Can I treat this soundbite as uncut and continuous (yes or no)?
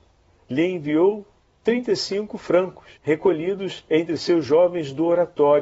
no